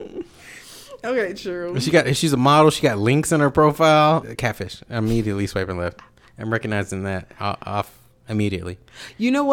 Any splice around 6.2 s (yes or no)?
no